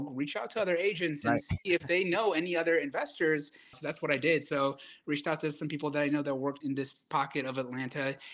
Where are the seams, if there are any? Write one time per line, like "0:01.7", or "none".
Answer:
0:03.7
0:06.6